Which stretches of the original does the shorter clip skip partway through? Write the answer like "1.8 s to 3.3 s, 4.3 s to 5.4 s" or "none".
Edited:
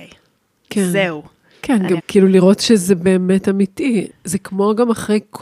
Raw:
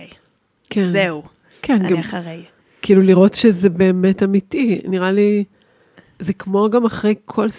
2.0 s to 2.7 s, 4.8 s to 6.0 s